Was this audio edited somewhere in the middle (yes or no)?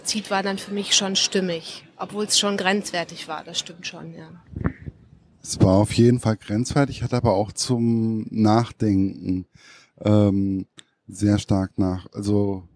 no